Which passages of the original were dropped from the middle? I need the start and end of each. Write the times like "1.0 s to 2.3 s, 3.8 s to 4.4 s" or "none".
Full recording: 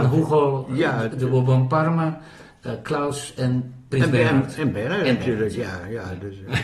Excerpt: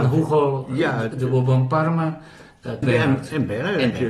2.8 s to 4.1 s